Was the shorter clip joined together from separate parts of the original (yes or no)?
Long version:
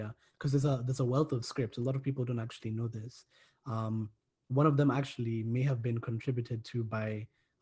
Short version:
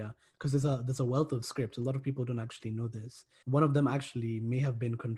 yes